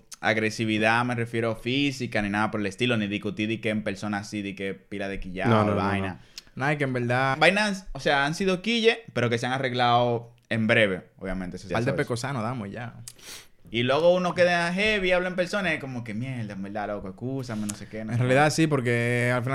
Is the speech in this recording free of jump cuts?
no; 2 cuts; at 7.3 s, 11.7 s

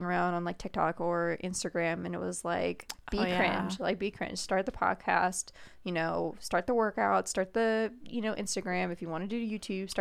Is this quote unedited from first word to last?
yes; 0 cuts

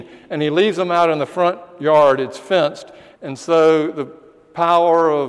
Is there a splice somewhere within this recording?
yes; 1 cut; at 3.2 s

